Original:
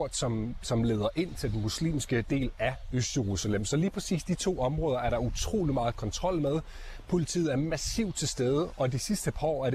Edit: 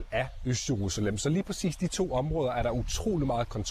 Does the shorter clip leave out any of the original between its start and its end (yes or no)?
no